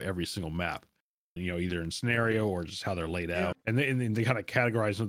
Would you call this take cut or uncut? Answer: cut